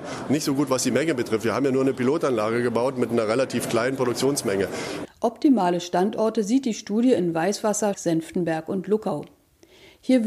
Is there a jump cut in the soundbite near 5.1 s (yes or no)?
yes